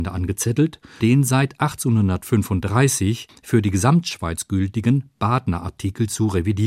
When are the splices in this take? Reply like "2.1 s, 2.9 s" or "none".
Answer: 1.0 s